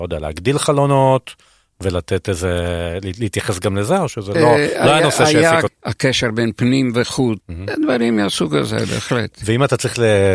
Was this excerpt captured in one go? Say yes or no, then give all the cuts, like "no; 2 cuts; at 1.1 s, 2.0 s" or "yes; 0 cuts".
no; 3 cuts; at 4.3 s, 5.7 s, 7.4 s